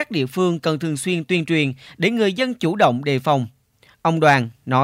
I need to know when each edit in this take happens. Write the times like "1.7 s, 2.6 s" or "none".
none